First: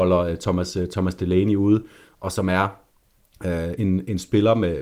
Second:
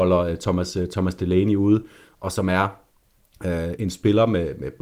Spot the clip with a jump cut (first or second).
second